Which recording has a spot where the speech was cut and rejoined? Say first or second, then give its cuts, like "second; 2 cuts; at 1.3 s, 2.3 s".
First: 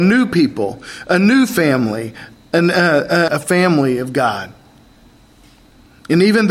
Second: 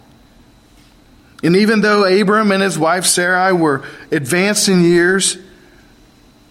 first; 1 cut; at 3.3 s